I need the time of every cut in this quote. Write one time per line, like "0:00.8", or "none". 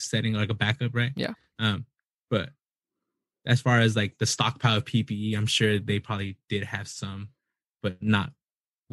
none